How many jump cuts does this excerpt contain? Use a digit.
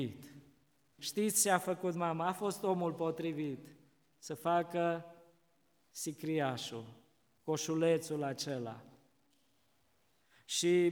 1